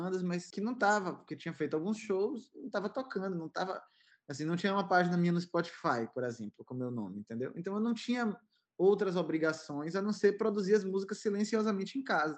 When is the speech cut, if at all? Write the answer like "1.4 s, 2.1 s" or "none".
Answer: none